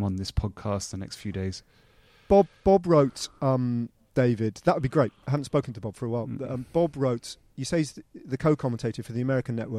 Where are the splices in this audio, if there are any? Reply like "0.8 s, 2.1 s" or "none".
none